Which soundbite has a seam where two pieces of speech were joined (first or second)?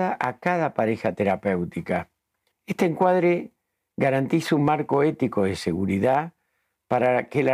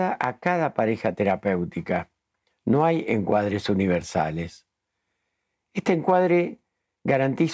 first